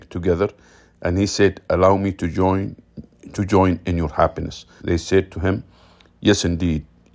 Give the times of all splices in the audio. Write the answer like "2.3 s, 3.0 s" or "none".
4.8 s